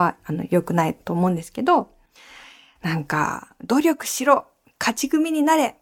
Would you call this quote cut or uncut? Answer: uncut